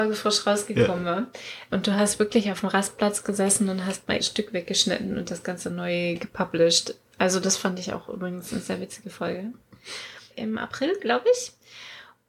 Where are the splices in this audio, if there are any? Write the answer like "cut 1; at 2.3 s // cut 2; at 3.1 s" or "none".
cut 1; at 4.2 s // cut 2; at 10.3 s